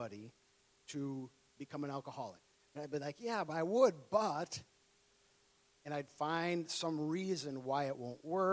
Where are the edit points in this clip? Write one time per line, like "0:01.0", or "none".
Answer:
0:02.5

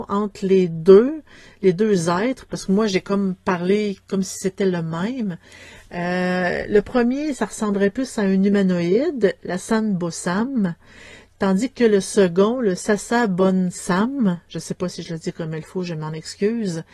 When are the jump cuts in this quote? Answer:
none

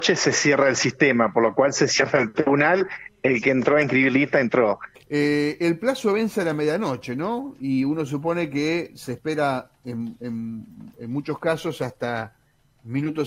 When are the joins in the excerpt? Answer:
0:05.0

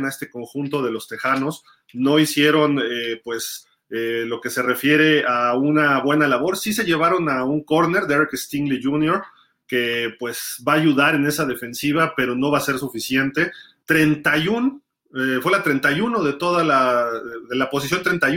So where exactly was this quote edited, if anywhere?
0:13.8

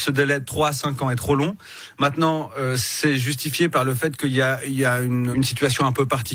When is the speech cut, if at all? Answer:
0:05.3

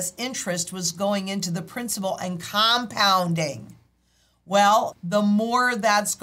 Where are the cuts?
0:04.9

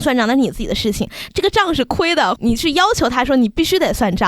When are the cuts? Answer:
0:01.3
0:02.4

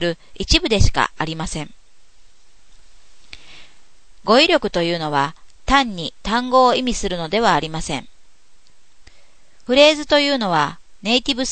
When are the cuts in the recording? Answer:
0:04.2
0:09.7

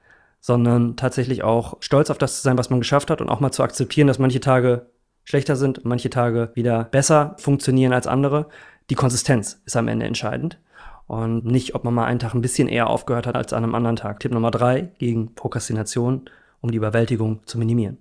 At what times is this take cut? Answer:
0:11.4
0:14.2

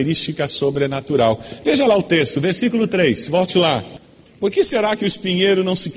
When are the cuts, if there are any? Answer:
0:04.3

